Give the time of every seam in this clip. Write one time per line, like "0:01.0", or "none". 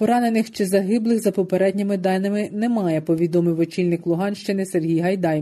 none